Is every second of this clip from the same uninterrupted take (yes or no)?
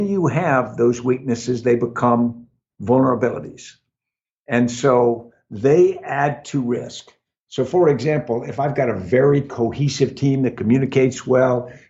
yes